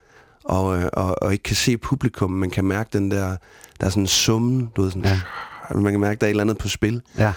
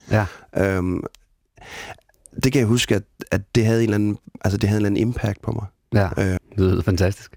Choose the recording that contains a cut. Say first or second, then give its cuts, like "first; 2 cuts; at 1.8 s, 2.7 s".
second; 1 cut; at 6.4 s